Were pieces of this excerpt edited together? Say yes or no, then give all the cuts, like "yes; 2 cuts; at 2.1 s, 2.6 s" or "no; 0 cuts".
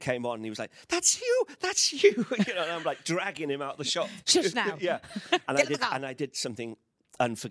no; 0 cuts